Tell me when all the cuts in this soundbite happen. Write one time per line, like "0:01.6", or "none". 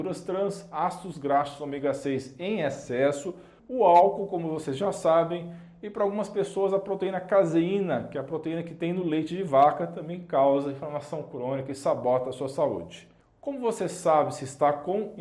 0:03.6